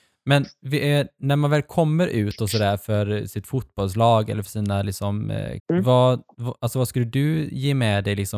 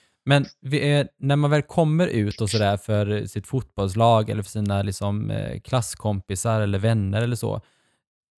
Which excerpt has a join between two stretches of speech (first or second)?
first